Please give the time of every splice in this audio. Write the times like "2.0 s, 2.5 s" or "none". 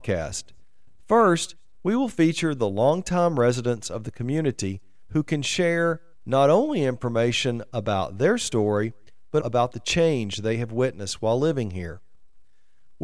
9.4 s